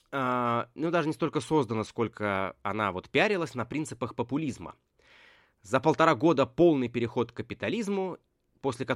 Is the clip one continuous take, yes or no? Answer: yes